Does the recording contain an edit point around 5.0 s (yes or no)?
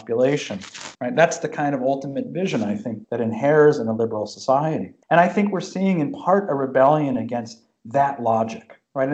yes